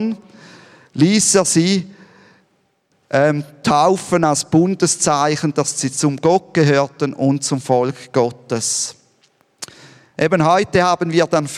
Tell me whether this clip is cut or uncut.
uncut